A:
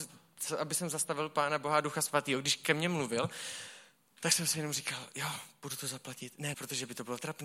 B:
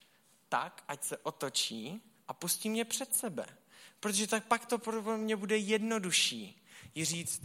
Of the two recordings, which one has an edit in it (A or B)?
A